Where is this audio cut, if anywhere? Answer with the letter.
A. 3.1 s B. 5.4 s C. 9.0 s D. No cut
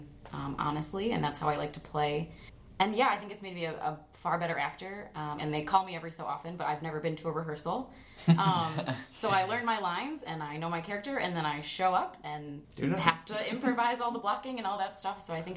B